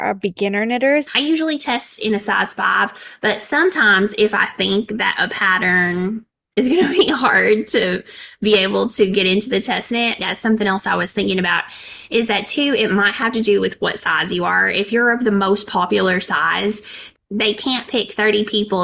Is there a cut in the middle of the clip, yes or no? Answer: yes